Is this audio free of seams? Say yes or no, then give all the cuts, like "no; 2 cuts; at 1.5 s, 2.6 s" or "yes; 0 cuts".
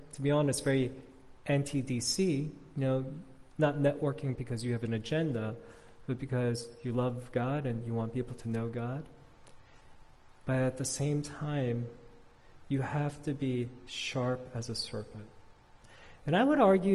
yes; 0 cuts